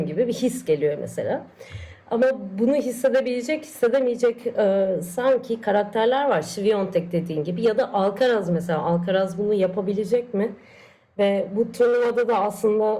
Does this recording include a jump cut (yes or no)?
no